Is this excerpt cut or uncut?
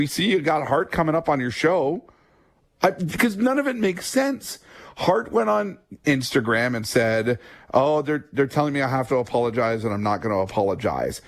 uncut